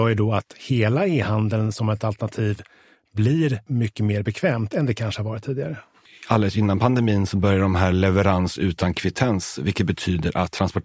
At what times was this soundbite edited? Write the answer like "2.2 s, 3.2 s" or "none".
none